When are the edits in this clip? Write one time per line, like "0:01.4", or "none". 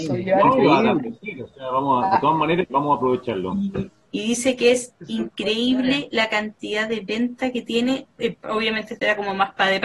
0:02.7
0:04.1